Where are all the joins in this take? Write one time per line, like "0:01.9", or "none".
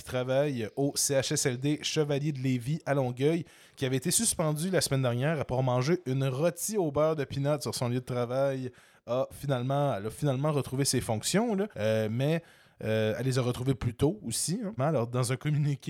0:11.7
0:14.8